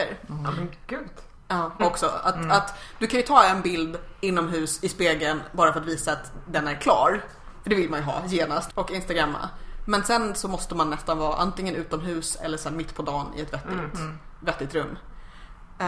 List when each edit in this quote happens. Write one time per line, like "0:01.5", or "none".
0:01.8
0:08.7

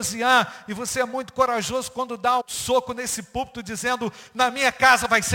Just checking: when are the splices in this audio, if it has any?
0:02.4

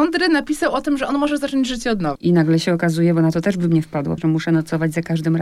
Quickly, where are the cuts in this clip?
0:02.2
0:04.2

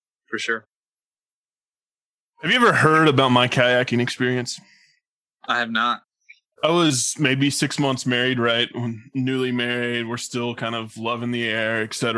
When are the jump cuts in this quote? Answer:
0:06.5

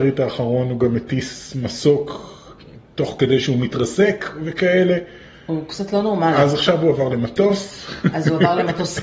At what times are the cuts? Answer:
none

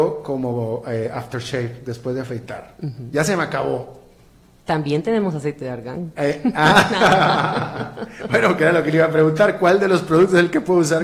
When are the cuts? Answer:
none

